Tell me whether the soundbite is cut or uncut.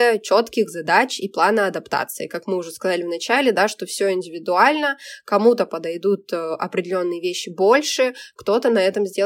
uncut